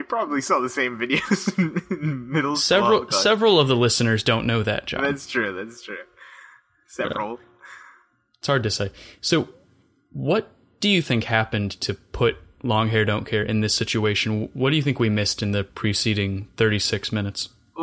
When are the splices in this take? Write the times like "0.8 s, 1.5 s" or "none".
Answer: none